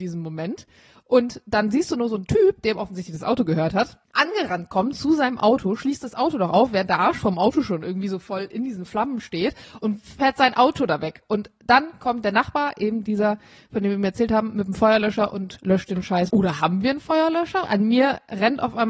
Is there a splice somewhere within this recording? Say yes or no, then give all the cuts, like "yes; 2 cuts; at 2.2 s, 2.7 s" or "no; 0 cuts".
yes; 3 cuts; at 4.0 s, 16.3 s, 17.6 s